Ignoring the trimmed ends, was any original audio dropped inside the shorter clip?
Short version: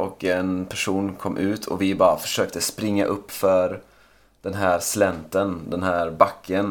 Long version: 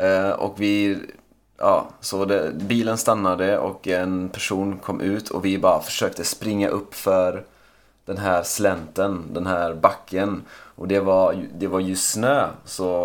no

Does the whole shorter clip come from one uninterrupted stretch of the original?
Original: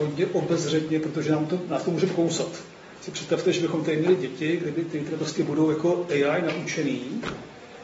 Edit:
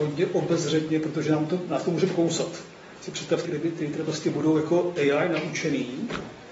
no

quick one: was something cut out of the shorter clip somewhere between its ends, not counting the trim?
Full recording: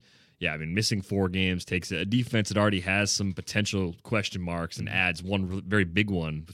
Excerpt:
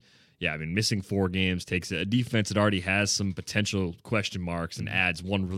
no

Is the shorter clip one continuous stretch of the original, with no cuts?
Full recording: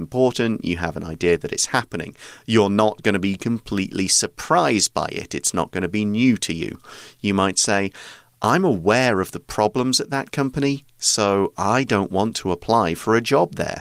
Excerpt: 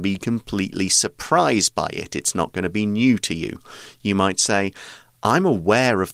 yes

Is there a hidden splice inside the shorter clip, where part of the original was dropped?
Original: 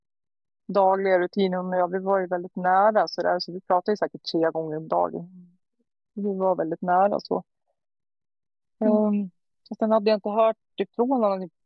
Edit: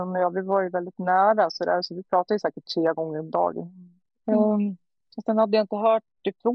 yes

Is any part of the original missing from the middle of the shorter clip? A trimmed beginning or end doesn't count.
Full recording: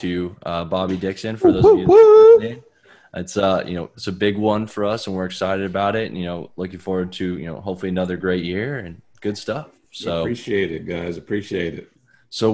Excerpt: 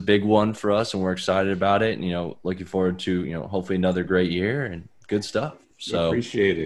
no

